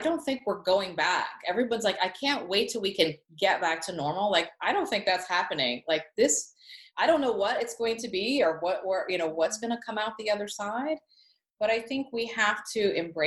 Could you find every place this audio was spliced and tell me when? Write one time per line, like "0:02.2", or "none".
none